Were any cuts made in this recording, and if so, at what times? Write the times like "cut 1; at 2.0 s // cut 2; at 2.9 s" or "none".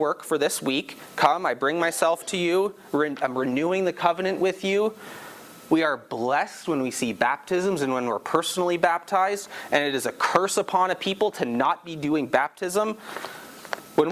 cut 1; at 1.1 s // cut 2; at 2.9 s // cut 3; at 5.7 s

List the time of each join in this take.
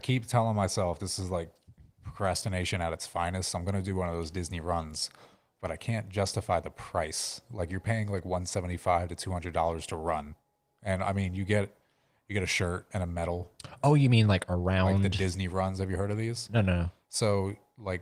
none

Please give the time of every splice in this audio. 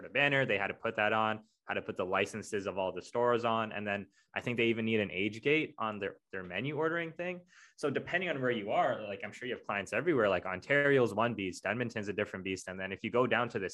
none

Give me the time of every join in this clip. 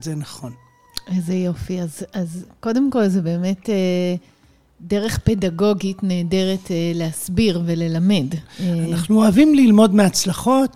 cut 1; at 8.5 s

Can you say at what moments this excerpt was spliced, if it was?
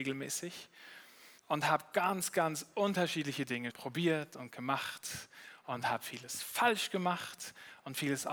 cut 1; at 1.4 s // cut 2; at 3.7 s

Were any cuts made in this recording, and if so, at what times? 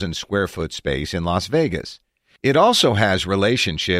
none

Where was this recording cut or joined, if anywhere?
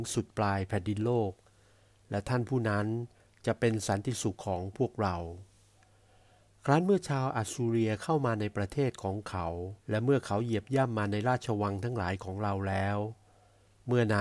cut 1; at 4.4 s // cut 2; at 9.8 s

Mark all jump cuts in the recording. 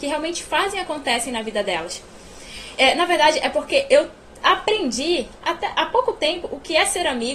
cut 1; at 2.8 s

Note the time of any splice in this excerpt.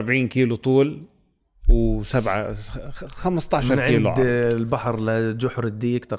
none

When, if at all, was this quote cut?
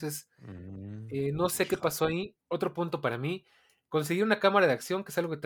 cut 1; at 2.4 s

